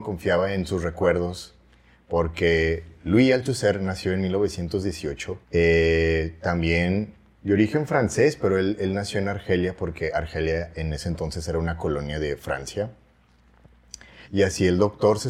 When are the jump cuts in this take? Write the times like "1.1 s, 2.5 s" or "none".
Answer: 5.4 s, 14.2 s